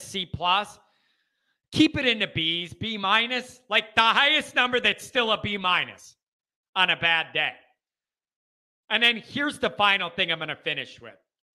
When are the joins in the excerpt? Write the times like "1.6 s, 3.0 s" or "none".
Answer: none